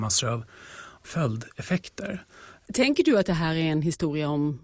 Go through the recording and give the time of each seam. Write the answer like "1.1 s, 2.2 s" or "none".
2.6 s

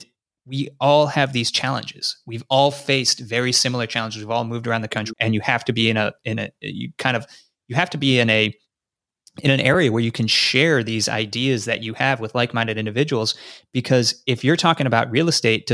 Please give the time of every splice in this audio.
5.1 s

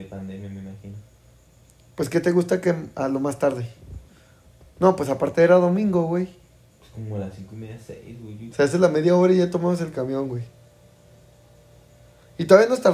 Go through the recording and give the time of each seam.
8.5 s

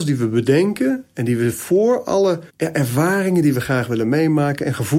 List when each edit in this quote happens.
2.5 s

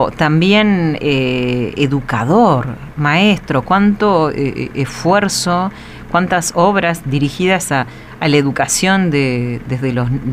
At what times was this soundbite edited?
none

